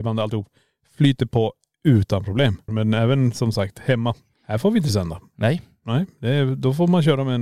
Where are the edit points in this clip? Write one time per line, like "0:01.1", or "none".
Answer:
0:02.7